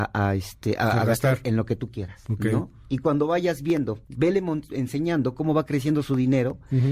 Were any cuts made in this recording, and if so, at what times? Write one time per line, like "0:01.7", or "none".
0:04.0